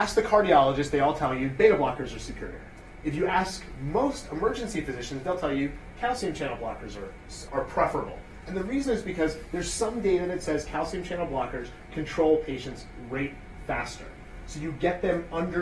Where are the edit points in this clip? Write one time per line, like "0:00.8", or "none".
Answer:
0:07.5